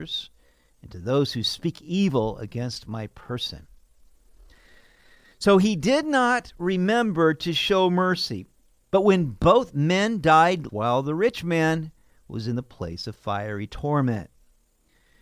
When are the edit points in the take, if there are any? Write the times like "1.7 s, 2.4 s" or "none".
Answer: 8.8 s, 10.7 s